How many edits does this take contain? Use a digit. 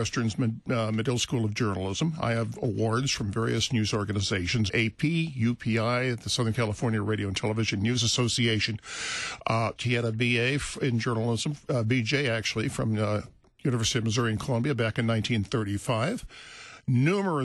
2